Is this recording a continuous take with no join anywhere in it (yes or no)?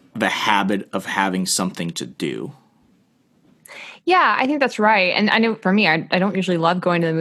no